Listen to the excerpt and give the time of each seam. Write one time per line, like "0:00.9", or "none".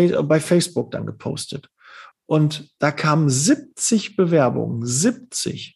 0:02.1